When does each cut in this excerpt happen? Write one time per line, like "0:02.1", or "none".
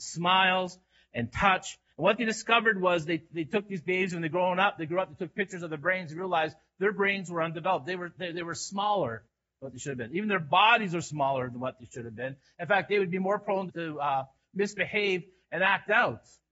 0:13.7